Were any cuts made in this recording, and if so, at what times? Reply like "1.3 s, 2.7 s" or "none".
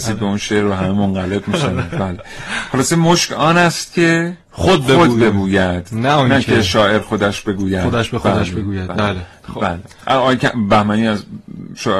none